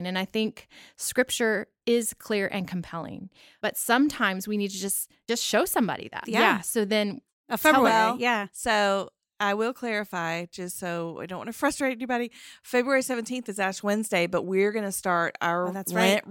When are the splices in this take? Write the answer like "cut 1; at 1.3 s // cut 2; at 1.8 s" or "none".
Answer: cut 1; at 6.2 s

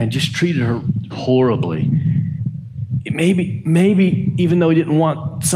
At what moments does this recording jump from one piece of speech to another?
cut 1; at 1.1 s

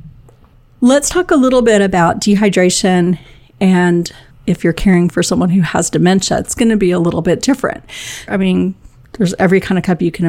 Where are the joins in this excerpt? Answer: cut 1; at 8.3 s

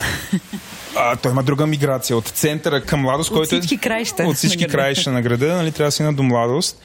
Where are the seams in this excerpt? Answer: cut 1; at 1.2 s // cut 2; at 2.8 s

